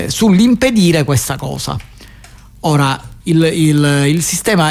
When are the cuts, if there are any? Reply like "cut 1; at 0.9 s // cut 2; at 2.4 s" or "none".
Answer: cut 1; at 3.2 s